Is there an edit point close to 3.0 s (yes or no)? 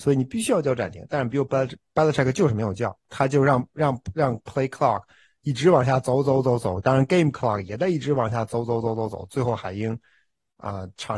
no